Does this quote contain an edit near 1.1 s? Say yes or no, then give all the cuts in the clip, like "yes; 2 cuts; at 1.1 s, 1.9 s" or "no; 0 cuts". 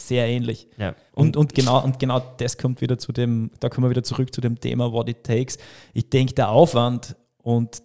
yes; 1 cut; at 1.1 s